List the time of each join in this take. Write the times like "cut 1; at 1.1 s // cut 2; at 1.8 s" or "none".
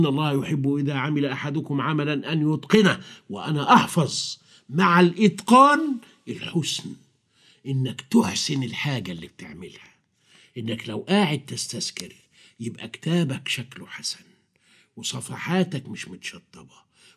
none